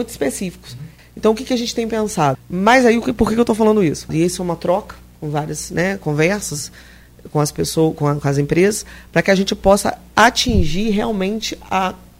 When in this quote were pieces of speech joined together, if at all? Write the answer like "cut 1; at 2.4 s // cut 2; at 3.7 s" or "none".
cut 1; at 1.0 s // cut 2; at 2.3 s // cut 3; at 4.1 s